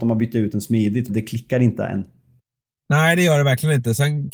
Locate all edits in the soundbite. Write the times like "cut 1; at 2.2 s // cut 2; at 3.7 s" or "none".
cut 1; at 1.1 s